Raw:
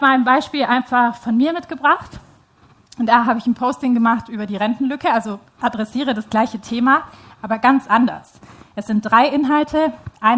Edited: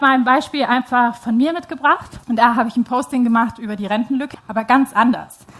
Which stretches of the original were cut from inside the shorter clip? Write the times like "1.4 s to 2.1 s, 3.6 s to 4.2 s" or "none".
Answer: 2.2 s to 2.9 s, 5.0 s to 7.3 s